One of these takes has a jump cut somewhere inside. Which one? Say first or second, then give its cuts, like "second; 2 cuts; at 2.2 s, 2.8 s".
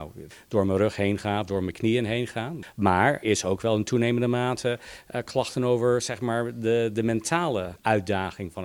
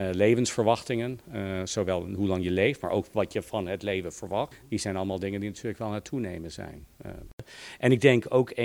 first; 1 cut; at 3.2 s